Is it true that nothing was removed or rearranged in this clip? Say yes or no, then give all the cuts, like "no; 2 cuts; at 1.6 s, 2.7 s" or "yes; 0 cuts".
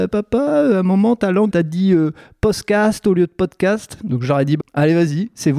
no; 2 cuts; at 1.5 s, 4.6 s